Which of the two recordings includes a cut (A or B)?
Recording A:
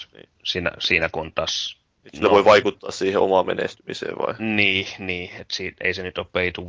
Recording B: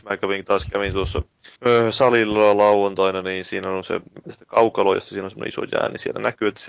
B